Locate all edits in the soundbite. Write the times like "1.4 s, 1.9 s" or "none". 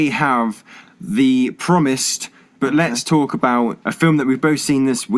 2.6 s, 3.8 s